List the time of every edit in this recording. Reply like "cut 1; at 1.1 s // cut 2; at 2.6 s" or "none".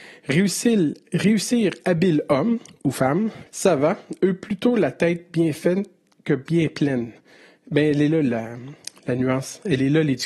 cut 1; at 3.5 s